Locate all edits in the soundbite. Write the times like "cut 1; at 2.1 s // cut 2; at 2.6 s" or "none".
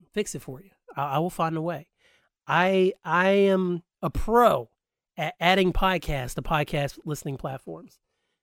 none